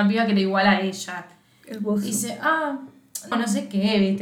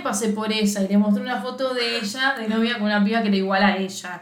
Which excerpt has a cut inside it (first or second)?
first